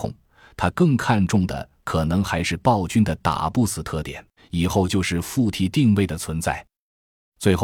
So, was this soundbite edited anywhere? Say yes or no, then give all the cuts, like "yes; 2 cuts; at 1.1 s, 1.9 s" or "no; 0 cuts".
yes; 1 cut; at 4.4 s